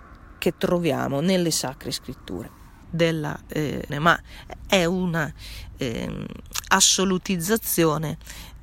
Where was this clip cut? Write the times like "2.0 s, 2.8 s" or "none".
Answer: 2.8 s, 3.9 s